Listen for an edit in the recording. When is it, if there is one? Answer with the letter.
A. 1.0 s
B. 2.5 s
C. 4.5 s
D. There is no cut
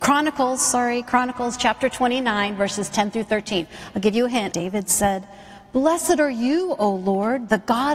C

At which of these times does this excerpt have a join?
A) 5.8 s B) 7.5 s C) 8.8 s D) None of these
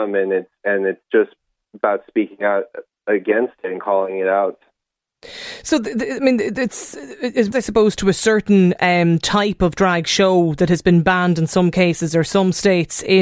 B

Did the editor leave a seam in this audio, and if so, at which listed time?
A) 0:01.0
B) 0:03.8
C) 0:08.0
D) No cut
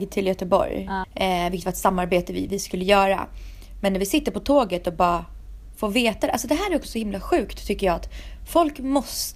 A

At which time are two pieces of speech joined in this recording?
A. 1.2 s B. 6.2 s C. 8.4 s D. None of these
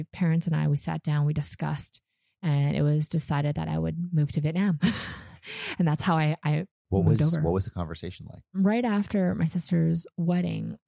C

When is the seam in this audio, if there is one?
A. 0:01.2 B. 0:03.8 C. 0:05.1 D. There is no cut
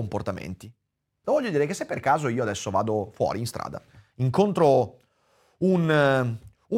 A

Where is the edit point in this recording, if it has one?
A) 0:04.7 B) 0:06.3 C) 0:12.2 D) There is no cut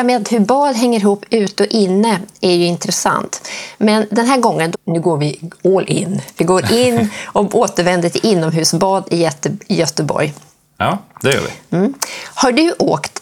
A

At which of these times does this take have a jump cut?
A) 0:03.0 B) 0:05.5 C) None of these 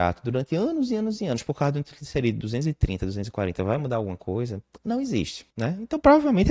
B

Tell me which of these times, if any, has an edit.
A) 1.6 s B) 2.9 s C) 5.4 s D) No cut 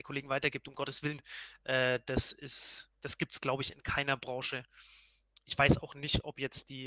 D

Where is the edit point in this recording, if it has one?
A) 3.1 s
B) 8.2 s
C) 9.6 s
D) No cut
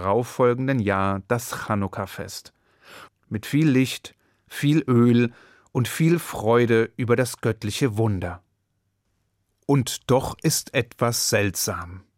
A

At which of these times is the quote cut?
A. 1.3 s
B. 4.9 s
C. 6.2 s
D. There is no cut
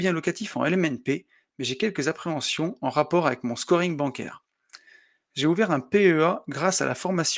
D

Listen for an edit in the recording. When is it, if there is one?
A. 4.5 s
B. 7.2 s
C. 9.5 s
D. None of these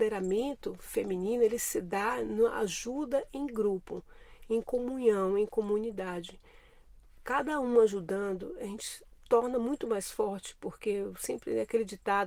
D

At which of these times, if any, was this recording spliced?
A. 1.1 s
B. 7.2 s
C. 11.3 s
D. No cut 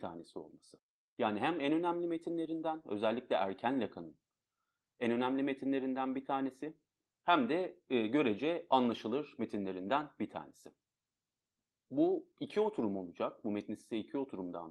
D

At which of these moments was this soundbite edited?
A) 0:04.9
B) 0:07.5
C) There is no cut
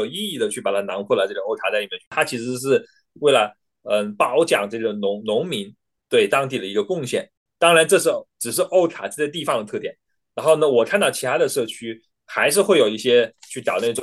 B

